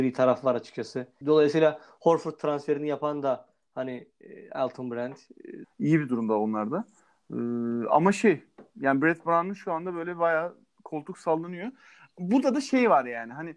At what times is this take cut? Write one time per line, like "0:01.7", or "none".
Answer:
0:01.2
0:05.6